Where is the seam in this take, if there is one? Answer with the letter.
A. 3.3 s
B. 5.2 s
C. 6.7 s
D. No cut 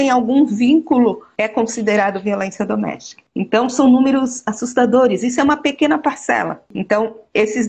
D